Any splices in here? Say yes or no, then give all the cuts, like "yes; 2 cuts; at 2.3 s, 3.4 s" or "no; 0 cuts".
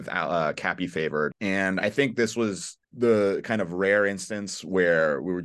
yes; 2 cuts; at 1.3 s, 2.8 s